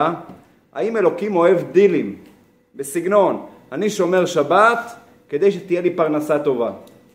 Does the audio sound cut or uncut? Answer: uncut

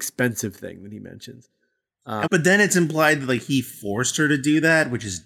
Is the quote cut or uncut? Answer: cut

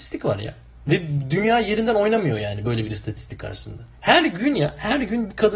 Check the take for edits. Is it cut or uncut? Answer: cut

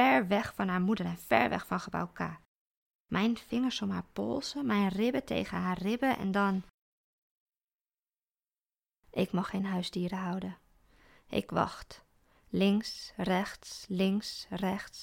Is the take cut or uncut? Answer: uncut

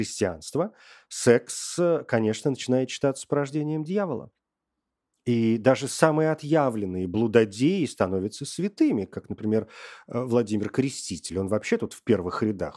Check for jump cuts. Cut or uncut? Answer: uncut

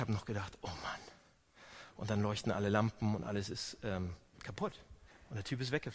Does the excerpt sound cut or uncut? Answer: uncut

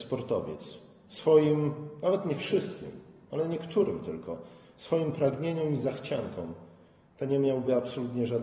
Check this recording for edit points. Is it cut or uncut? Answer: uncut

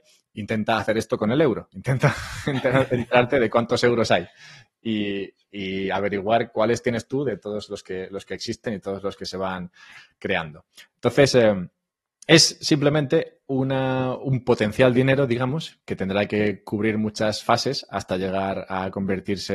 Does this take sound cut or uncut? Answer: uncut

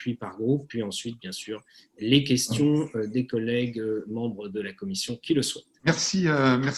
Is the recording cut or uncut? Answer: cut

